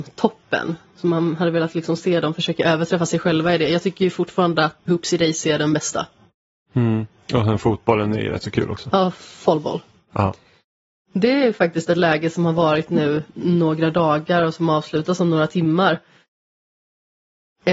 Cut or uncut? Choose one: cut